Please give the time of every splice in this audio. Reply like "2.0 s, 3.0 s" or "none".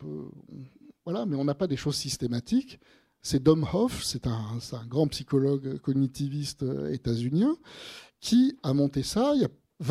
3.2 s